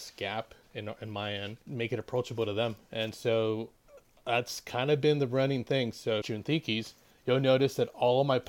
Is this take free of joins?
no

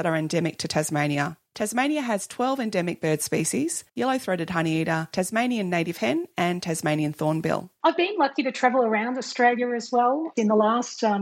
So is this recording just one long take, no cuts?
no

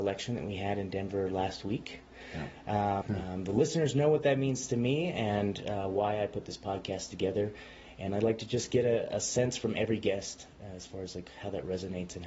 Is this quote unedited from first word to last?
no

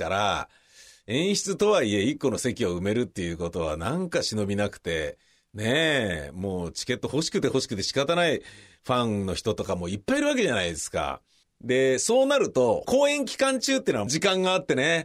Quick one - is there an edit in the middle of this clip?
yes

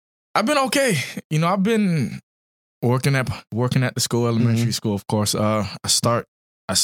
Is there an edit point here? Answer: no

